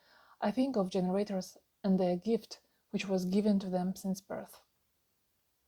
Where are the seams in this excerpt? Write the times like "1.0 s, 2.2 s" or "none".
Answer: none